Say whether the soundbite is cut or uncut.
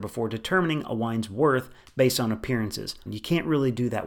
cut